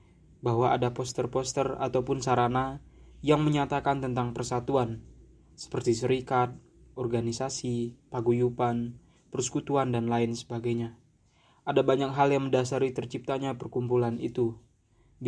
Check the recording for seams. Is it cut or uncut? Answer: uncut